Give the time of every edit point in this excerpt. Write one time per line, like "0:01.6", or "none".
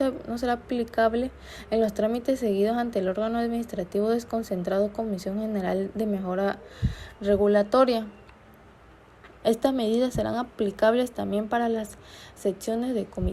0:09.4